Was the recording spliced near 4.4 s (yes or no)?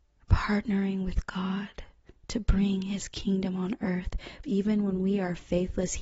yes